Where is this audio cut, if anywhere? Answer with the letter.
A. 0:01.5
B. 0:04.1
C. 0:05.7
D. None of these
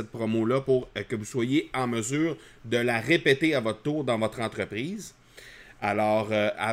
D